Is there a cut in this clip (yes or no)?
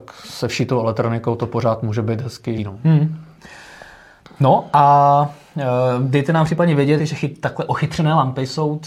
yes